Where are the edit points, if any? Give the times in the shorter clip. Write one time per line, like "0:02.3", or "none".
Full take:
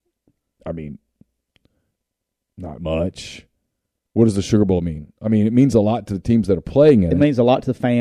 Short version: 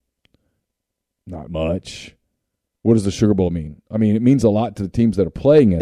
none